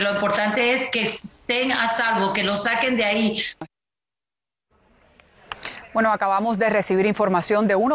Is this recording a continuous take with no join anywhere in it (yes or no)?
yes